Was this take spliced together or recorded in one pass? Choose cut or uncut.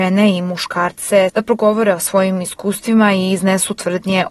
cut